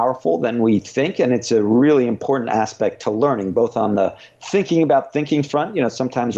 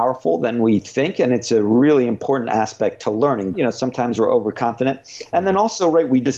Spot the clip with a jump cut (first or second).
second